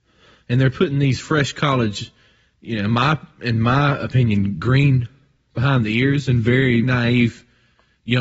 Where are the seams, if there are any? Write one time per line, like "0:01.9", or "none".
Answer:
0:06.8

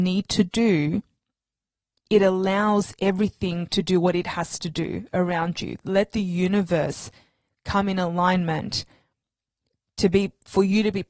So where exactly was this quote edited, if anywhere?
none

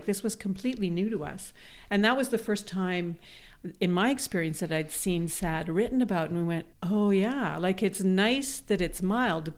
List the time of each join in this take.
0:06.7

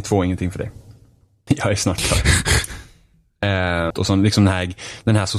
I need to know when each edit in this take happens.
0:01.5
0:03.9

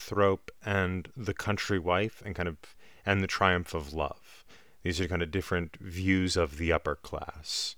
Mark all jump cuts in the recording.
none

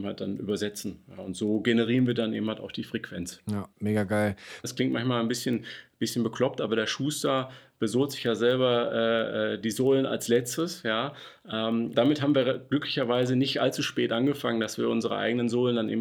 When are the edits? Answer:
0:04.6
0:11.9

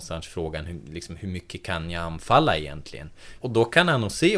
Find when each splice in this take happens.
0:03.4

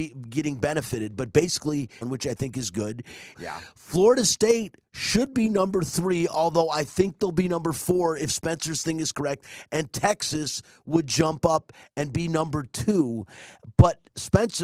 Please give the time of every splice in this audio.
0:02.0
0:03.3

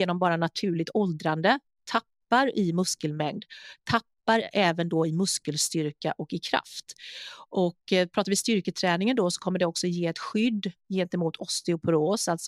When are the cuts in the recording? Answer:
none

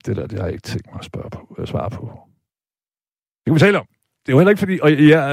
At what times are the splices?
none

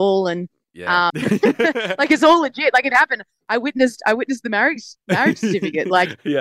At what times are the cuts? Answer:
0:01.1

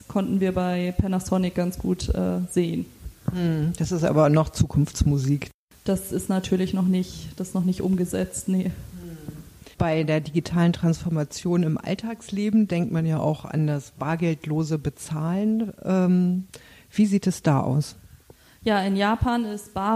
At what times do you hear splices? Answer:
0:09.7

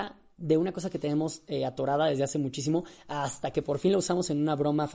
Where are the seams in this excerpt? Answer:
none

